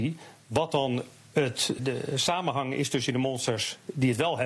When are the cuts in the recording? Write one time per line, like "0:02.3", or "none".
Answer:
0:01.8